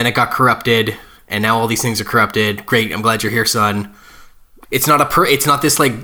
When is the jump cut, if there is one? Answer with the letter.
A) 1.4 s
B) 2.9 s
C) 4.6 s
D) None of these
C